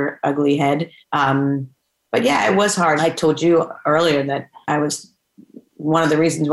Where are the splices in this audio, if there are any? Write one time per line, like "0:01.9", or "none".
0:01.0
0:03.0
0:04.6